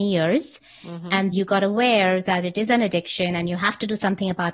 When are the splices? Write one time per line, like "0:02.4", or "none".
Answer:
0:01.3